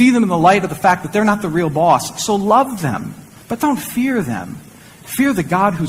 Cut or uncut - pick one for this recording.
uncut